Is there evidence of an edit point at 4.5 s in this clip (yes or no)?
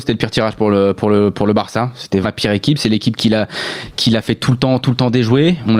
no